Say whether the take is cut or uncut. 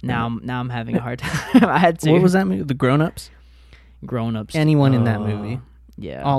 uncut